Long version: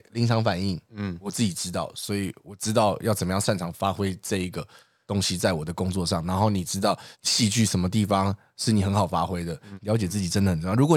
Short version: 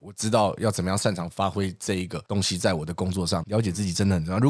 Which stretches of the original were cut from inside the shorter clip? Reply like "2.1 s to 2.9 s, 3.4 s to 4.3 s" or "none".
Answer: 4.7 s to 5.1 s, 6.2 s to 9.8 s